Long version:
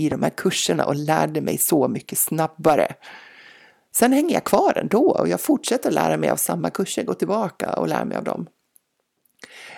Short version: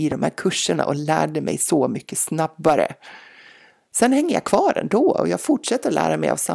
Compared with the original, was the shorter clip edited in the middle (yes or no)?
no